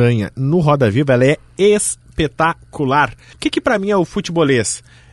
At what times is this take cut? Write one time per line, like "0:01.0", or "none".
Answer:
0:03.3